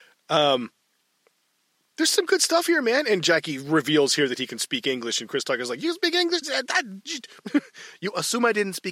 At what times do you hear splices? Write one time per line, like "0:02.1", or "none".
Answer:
0:06.4